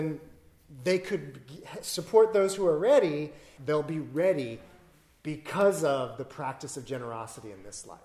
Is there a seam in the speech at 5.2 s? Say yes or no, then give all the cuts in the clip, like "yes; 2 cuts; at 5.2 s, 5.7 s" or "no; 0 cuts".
no; 1 cut; at 3.6 s